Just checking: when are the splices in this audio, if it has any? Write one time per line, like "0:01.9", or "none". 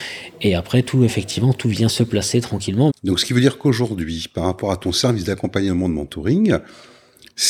0:01.9
0:02.9